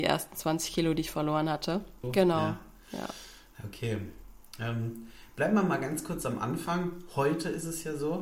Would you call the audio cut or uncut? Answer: cut